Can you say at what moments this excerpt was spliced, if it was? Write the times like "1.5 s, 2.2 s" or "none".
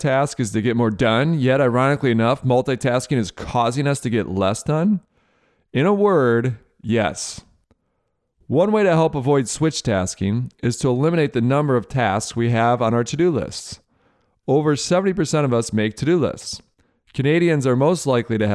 none